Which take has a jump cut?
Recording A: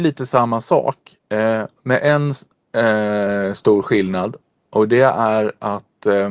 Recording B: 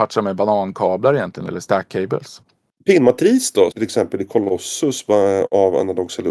B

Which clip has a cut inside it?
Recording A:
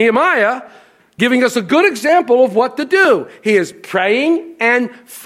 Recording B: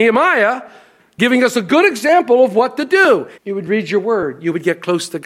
B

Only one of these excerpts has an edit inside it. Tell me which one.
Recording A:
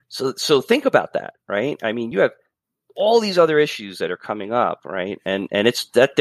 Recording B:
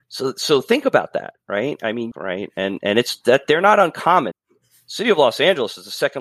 B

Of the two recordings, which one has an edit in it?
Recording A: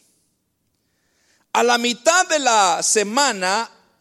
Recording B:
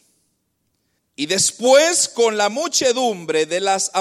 B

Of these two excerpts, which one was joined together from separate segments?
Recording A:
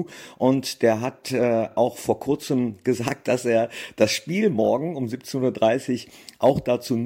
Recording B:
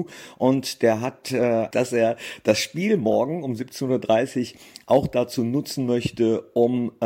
B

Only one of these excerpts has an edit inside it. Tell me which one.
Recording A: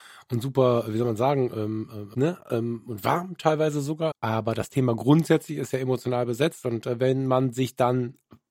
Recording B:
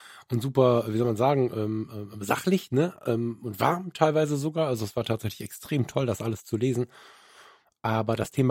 A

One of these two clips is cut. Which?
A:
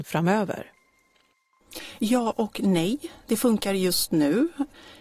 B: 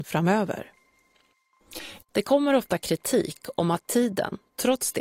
B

